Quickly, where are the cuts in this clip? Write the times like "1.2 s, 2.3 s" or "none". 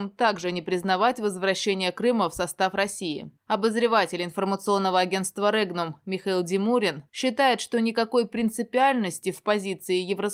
none